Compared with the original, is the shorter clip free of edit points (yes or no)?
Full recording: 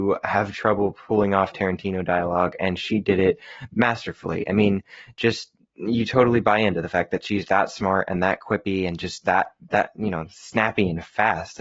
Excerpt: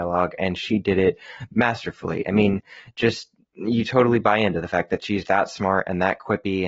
yes